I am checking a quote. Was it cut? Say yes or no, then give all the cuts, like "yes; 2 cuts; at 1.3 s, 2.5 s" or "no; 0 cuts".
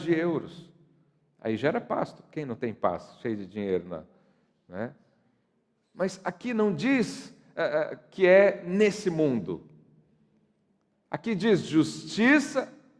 no; 0 cuts